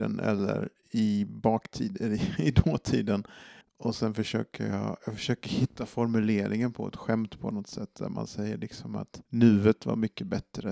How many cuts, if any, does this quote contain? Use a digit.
2